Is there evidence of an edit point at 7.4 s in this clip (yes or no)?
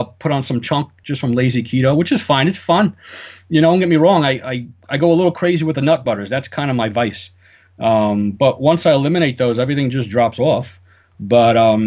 no